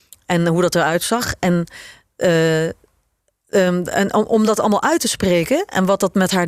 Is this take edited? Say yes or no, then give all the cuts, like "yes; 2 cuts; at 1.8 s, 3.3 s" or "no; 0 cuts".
no; 0 cuts